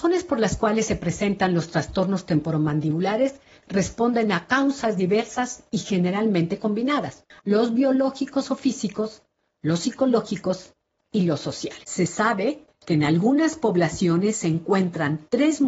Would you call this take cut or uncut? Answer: cut